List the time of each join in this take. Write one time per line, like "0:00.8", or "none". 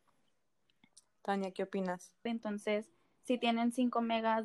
0:02.3

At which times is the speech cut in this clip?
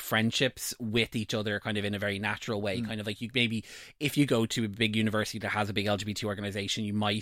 none

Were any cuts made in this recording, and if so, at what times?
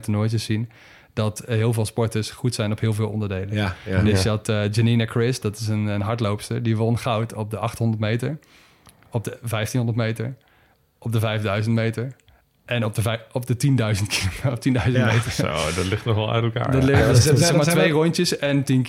none

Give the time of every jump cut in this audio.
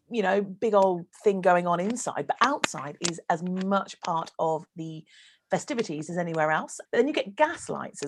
0:06.9

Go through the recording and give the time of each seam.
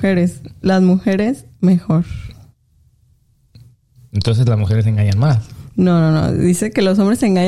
none

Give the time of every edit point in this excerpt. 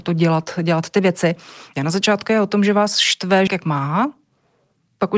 0:01.8
0:03.5

